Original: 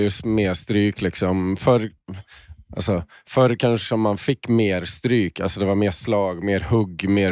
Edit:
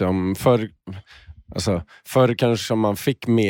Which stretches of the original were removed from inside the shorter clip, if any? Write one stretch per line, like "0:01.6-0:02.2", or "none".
none